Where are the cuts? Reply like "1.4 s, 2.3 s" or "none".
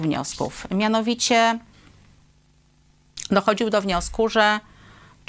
none